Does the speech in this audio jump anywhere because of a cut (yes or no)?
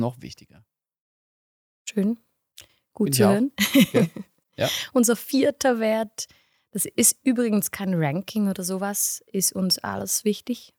no